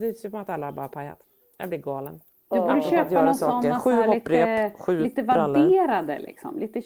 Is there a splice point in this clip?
no; 0 cuts

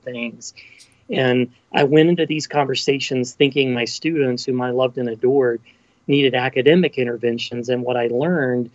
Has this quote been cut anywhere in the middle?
no; 0 cuts

